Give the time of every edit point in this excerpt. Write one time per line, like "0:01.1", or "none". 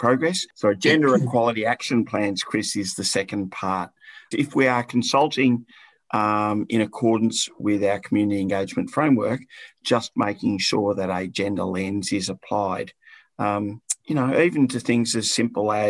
0:04.3
0:14.0